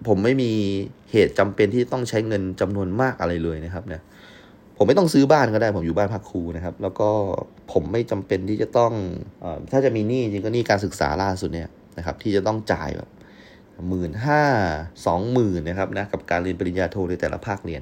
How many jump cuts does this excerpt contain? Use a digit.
2